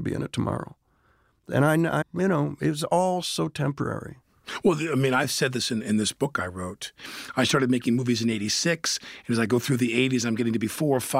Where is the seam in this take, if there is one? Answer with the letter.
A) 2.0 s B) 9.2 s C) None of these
A